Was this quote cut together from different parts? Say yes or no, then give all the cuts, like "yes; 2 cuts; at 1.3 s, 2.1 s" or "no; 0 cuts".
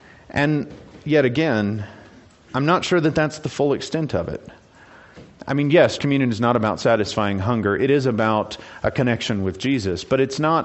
yes; 1 cut; at 6.0 s